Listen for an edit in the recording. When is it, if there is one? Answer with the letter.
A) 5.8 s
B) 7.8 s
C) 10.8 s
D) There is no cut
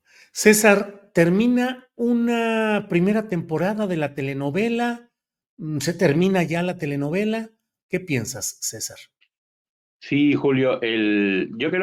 B